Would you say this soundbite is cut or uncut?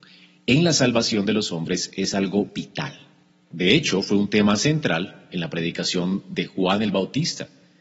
uncut